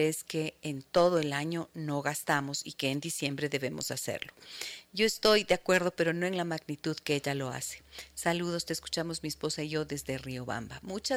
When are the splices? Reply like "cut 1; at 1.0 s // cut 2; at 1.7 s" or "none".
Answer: none